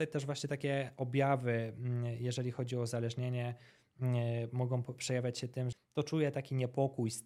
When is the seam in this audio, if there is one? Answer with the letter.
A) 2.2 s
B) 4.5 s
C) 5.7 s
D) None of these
C